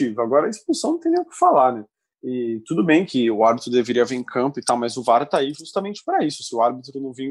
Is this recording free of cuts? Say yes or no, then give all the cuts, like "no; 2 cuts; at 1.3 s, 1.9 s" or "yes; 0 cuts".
yes; 0 cuts